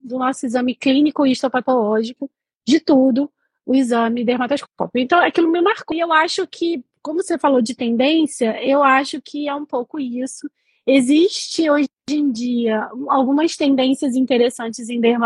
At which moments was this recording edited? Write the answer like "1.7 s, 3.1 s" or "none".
5.9 s

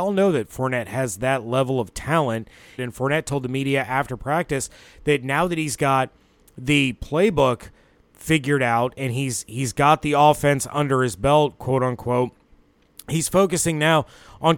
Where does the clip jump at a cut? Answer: 2.8 s

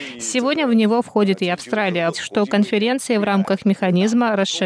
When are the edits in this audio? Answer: 2.1 s

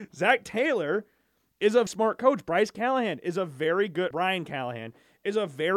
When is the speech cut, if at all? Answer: 1.9 s, 4.1 s

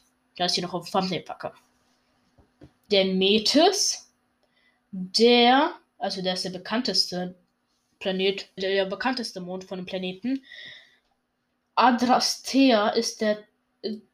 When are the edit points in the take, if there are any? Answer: 2.9 s, 8.6 s

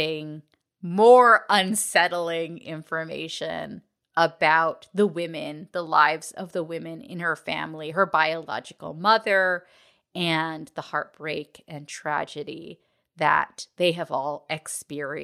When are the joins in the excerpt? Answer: none

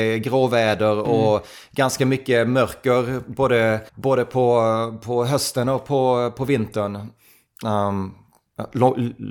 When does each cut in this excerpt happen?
3.9 s

